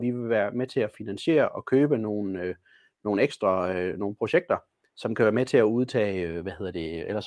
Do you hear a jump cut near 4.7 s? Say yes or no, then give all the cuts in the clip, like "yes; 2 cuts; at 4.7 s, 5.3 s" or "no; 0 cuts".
no; 0 cuts